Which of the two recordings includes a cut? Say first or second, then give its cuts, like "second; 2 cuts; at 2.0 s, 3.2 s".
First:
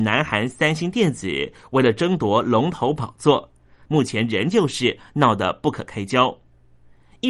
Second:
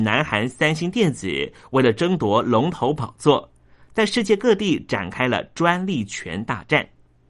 first; 1 cut; at 3.9 s